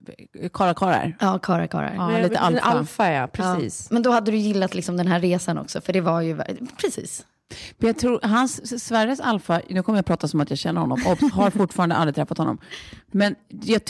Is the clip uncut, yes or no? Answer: yes